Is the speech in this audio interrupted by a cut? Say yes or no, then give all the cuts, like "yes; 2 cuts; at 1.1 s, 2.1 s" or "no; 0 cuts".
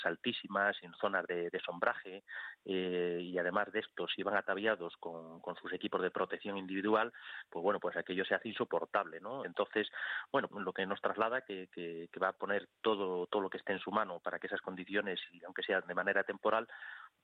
yes; 2 cuts; at 9.4 s, 10.5 s